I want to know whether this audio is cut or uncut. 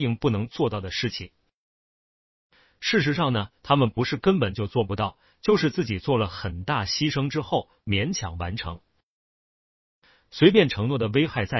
uncut